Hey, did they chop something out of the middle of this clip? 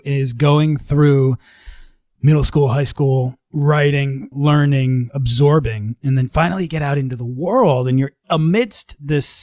yes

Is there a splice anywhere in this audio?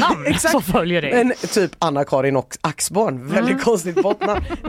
no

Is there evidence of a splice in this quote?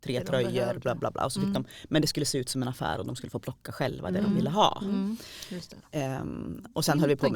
no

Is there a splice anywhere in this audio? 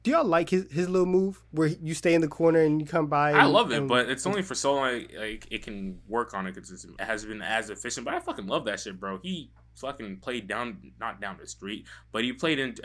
yes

